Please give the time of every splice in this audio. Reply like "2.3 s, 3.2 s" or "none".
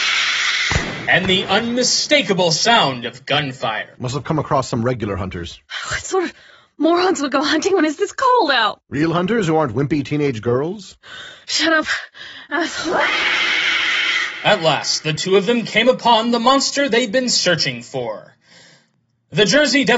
none